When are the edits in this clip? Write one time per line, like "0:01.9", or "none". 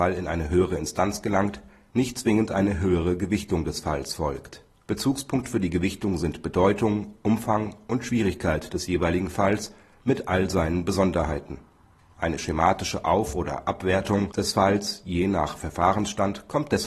none

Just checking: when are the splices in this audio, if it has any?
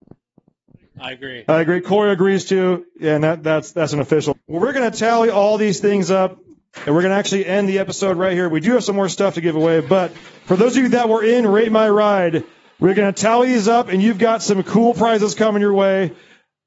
0:04.3

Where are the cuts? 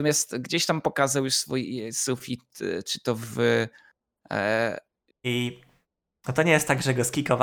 0:05.1

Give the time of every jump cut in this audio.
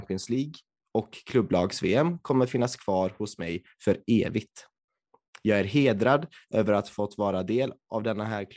none

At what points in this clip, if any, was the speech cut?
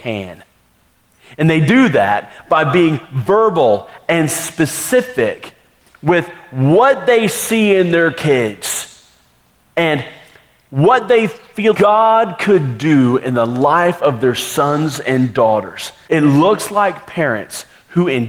0:11.7
0:16.1

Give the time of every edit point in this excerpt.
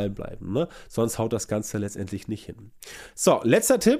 none

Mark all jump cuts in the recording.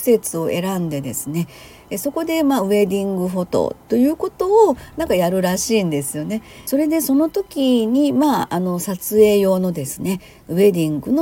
none

